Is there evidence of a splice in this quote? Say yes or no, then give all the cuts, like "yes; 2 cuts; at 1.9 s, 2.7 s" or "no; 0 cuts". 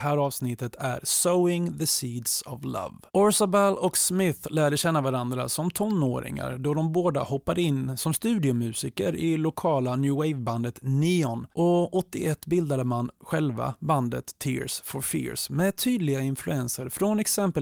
yes; 2 cuts; at 3.1 s, 11.5 s